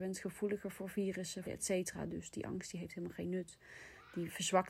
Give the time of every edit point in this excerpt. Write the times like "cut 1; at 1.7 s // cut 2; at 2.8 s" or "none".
cut 1; at 1.4 s